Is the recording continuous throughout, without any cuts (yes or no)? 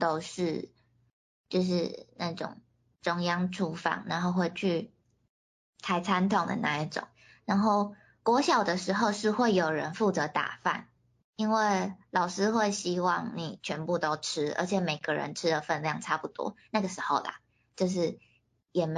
yes